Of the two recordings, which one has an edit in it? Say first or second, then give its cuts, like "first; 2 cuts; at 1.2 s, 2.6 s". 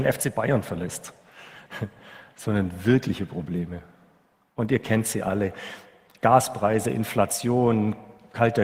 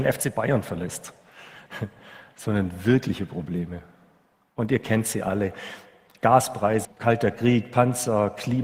second; 1 cut; at 6.8 s